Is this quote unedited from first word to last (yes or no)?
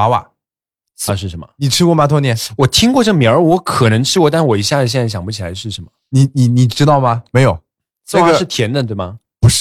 no